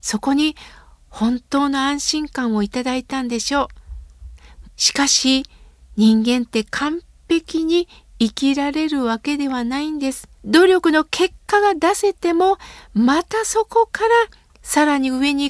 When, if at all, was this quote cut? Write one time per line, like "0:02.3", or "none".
0:04.6
0:10.3